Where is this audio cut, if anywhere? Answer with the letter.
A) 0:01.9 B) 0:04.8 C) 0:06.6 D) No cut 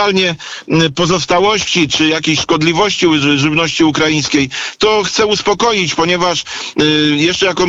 A